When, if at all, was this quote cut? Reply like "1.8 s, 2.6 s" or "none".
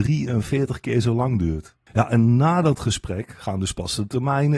1.8 s